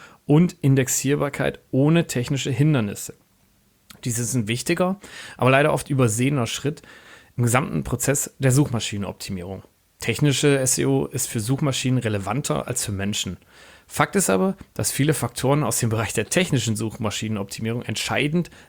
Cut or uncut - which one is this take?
uncut